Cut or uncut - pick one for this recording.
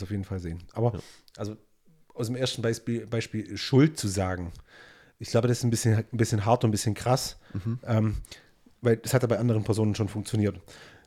uncut